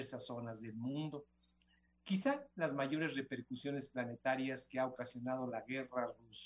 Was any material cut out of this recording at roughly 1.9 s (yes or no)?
no